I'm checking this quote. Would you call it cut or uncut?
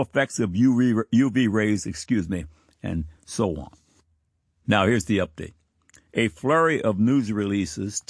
uncut